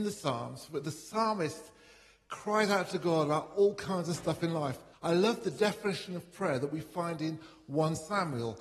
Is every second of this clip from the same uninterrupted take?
no; 1 cut; at 4.9 s

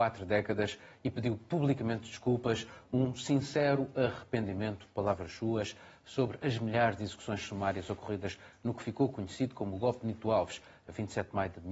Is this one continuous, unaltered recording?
yes; 0 cuts

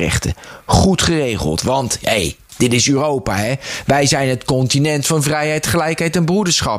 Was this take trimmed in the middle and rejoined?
no; 0 cuts

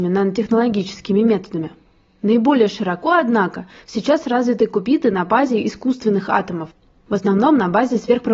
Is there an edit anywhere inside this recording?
no; 0 cuts

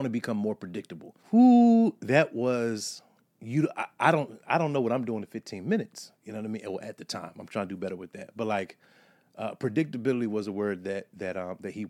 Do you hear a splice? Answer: yes; 1 cut; at 1.2 s

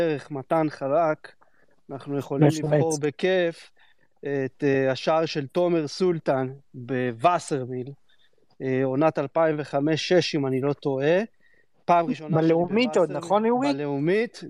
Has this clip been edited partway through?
no; 0 cuts

